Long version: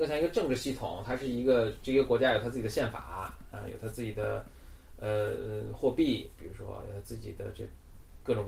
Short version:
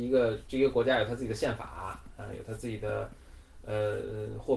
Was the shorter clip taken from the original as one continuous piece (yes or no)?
yes